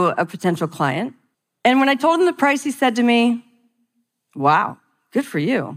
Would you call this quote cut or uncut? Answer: uncut